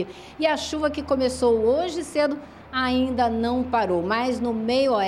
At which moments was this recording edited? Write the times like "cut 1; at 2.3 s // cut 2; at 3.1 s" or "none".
none